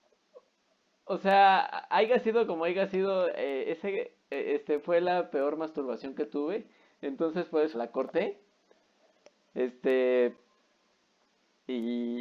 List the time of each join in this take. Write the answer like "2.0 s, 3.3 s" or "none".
7.7 s